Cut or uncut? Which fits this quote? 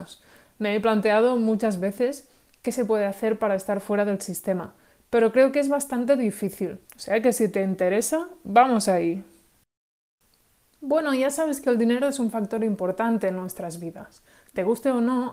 cut